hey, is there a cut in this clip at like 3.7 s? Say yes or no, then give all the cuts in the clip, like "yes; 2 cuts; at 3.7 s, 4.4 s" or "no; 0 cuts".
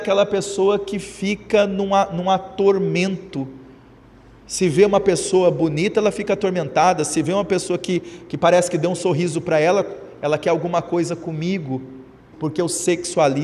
no; 1 cut; at 12.3 s